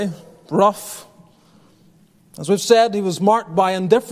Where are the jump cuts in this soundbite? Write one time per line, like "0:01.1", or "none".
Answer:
none